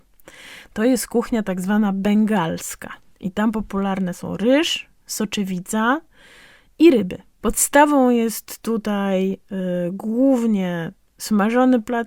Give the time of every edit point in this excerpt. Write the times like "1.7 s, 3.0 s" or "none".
7.4 s